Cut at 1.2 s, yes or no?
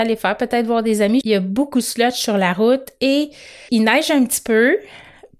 yes